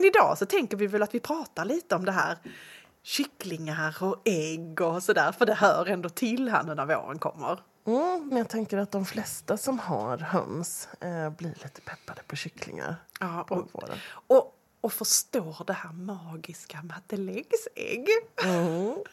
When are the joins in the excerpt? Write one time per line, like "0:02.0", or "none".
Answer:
0:08.3